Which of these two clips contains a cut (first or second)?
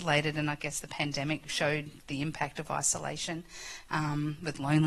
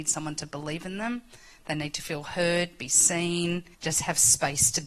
second